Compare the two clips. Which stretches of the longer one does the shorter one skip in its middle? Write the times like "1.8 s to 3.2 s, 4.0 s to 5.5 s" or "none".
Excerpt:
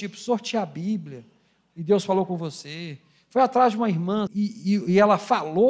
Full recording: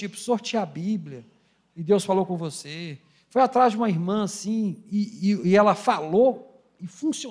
4.3 s to 4.8 s